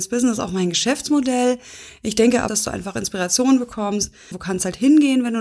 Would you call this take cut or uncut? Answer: cut